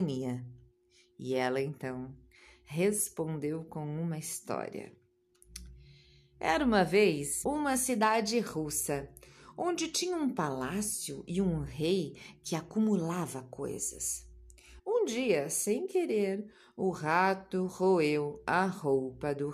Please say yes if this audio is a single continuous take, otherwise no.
no